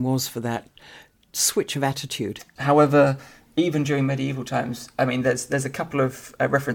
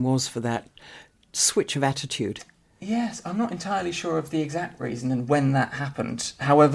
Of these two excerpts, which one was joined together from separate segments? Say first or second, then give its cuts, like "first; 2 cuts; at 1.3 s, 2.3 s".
first; 1 cut; at 2.6 s